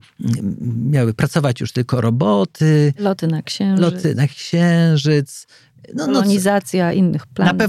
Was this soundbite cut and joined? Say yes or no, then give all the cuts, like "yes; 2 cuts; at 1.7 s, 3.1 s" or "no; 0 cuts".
no; 0 cuts